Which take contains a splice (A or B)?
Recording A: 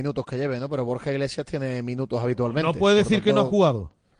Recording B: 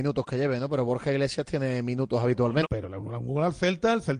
B